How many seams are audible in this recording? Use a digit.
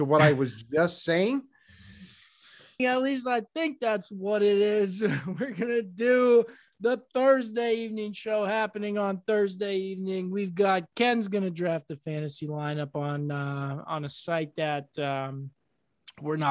1